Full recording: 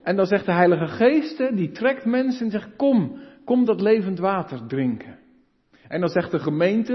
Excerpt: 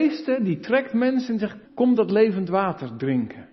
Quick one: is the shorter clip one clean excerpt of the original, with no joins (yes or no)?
no